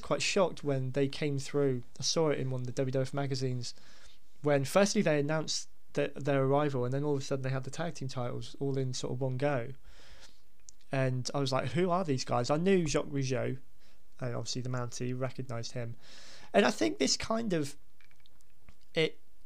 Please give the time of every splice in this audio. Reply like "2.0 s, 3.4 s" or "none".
11.7 s